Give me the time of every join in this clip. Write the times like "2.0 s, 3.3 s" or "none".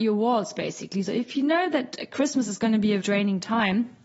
1.1 s, 3.0 s